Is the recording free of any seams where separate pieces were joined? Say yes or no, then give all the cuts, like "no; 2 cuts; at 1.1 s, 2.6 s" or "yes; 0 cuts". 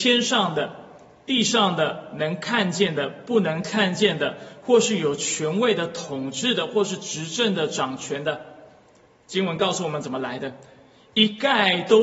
yes; 0 cuts